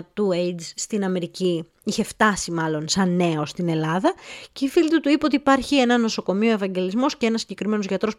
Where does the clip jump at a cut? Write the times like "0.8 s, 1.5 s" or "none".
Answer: none